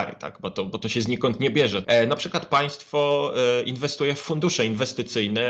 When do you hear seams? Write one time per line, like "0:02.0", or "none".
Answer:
0:01.8